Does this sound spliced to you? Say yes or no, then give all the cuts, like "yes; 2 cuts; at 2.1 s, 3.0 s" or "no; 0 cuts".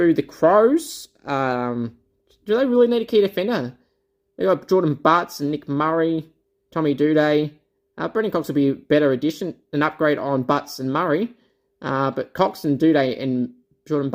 no; 0 cuts